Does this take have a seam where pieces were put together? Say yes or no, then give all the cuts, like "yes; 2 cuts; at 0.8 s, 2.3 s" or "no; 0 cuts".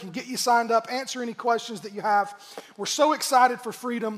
no; 0 cuts